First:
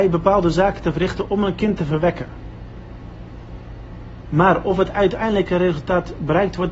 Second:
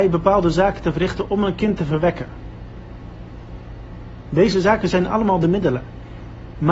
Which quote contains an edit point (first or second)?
first